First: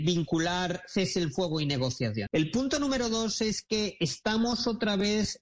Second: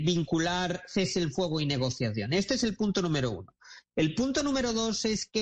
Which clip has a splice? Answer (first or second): first